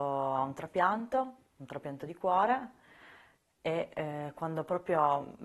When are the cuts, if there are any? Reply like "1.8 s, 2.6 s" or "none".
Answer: none